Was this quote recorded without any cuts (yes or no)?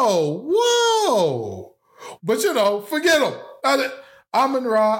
no